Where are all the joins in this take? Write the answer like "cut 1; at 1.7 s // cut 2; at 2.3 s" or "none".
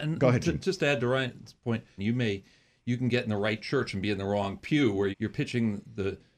cut 1; at 2.0 s // cut 2; at 5.1 s